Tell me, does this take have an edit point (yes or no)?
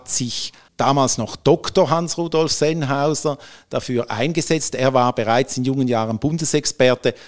no